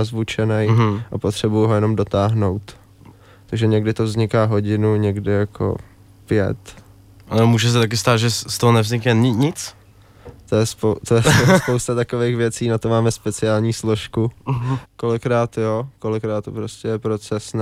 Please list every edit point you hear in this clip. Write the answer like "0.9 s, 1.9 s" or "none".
14.8 s